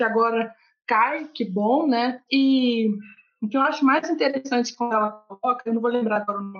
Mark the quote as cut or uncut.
cut